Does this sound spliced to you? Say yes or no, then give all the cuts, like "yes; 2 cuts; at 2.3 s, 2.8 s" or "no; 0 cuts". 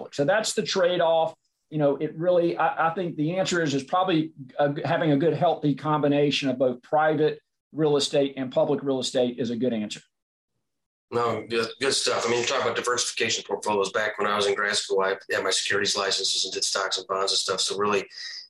no; 0 cuts